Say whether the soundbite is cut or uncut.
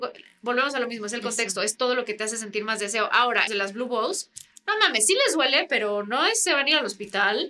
cut